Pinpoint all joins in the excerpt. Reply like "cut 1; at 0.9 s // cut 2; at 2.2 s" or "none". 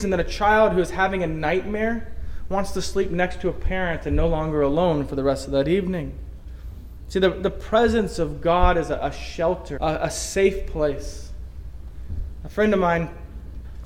cut 1; at 9.8 s

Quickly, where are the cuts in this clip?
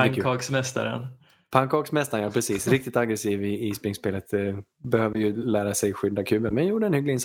none

